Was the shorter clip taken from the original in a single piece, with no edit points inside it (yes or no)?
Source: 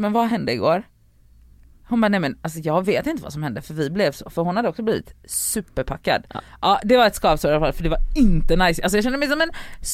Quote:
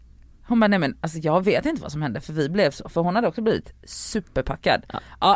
yes